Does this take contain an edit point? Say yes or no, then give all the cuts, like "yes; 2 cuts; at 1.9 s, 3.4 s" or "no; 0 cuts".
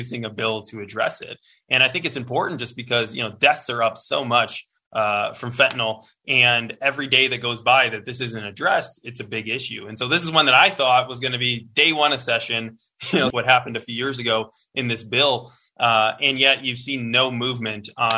yes; 1 cut; at 13.3 s